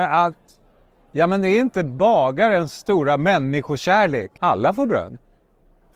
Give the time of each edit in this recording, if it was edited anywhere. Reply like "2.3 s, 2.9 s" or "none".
4.4 s